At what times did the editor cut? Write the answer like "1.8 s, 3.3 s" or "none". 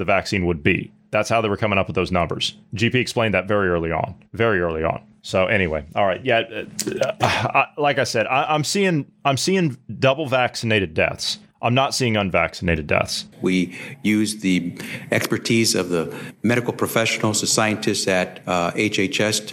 13.3 s